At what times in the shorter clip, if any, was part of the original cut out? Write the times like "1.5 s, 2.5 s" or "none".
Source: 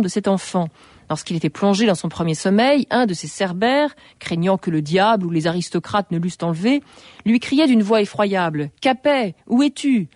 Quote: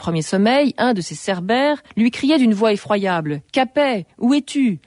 1.9 s